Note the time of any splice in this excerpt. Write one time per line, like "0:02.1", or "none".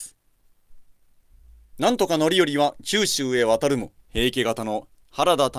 0:04.0